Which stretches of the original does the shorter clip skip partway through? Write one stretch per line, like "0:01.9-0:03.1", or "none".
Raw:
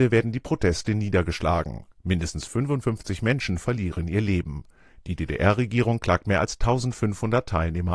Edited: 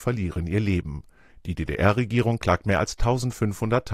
none